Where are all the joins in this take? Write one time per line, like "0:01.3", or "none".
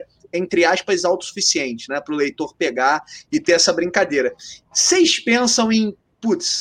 none